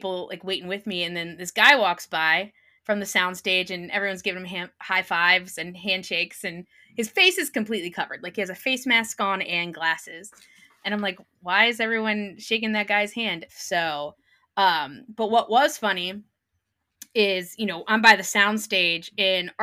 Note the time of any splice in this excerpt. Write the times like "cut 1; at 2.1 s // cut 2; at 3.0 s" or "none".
cut 1; at 13.5 s